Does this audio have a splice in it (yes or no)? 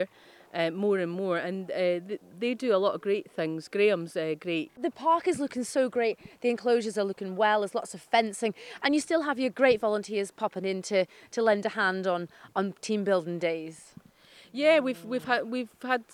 yes